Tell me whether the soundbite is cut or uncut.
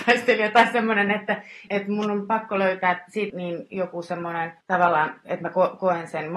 cut